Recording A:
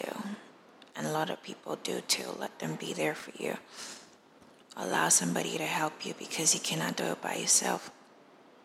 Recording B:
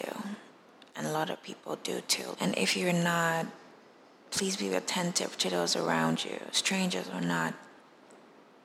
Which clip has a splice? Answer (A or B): B